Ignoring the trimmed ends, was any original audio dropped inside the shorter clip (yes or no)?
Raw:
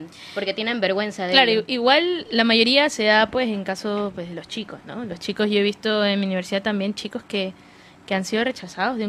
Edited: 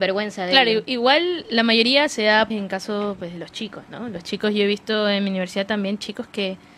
yes